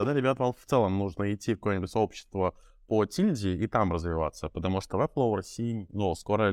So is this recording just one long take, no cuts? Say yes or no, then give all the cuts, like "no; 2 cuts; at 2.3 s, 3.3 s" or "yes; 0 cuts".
yes; 0 cuts